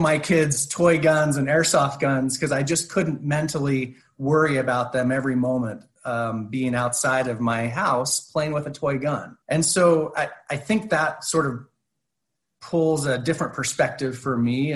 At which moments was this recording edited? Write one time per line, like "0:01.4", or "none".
0:09.4